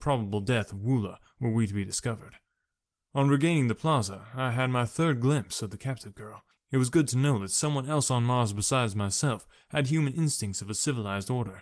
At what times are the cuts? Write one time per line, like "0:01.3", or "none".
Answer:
0:06.5